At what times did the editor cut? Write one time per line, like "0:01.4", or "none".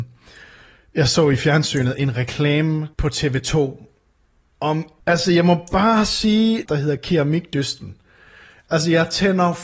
0:02.9
0:05.0
0:06.7

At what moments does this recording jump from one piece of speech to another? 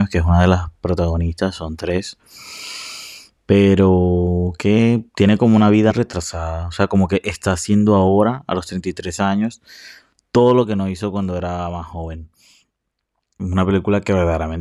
0:05.9
0:13.4

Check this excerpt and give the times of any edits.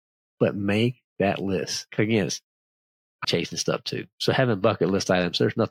0:01.9
0:03.2

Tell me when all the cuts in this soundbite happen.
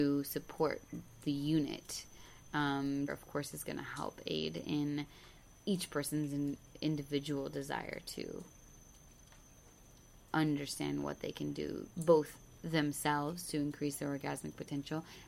0:03.1
0:11.9

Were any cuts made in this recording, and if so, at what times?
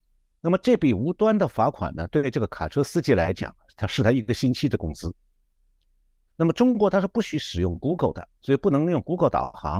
0:06.3
0:08.4

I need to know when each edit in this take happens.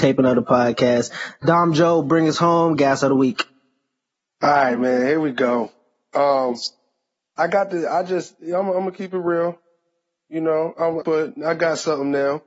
0:11.0

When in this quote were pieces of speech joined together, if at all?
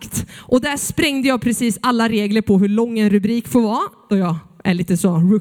0:04.1

